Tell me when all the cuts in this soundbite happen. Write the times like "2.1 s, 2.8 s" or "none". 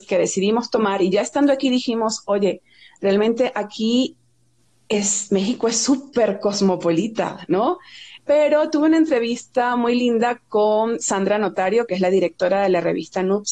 8.2 s